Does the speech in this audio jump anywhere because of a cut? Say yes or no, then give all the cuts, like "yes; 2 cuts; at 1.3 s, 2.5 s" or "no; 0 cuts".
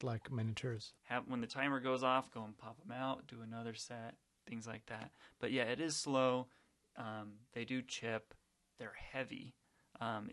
yes; 1 cut; at 1.0 s